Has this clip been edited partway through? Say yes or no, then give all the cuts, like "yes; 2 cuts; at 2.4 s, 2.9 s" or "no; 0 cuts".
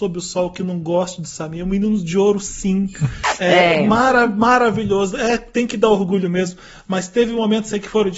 no; 0 cuts